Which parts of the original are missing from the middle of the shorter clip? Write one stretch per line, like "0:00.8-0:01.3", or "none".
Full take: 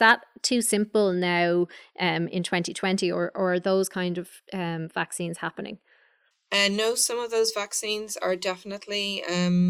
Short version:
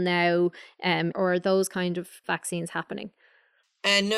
0:02.3-0:03.3
0:04.4-0:04.9